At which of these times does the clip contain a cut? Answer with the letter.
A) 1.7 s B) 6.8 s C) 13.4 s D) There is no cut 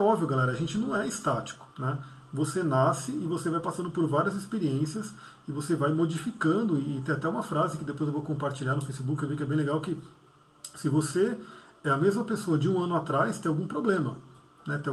A